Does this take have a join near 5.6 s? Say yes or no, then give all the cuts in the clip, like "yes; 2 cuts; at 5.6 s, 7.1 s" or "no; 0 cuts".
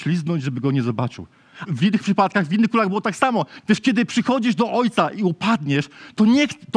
no; 2 cuts; at 1.7 s, 3.6 s